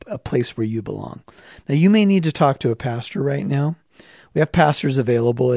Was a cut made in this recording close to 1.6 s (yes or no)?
no